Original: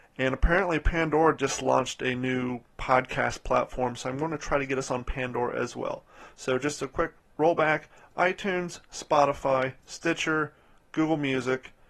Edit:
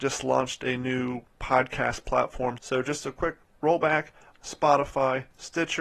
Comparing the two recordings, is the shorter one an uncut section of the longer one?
no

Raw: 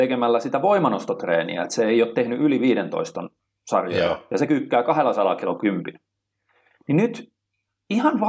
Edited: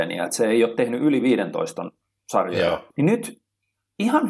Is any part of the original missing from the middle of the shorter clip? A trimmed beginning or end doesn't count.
yes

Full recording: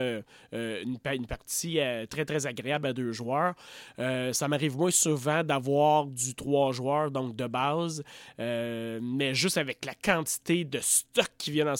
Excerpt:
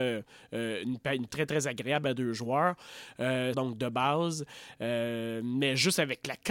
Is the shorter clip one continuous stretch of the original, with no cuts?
no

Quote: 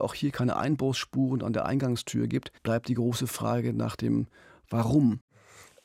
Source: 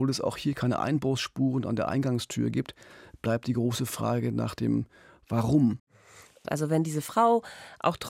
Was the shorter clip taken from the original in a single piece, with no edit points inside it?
no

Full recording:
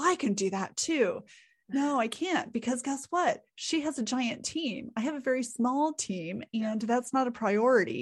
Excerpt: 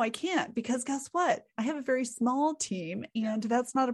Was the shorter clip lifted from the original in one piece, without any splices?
no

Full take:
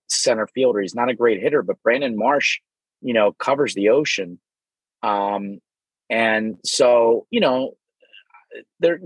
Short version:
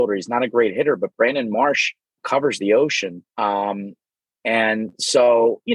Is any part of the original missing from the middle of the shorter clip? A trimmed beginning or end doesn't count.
yes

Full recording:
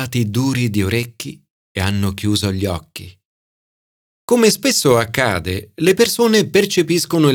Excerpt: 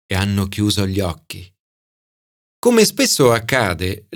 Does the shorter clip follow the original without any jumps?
yes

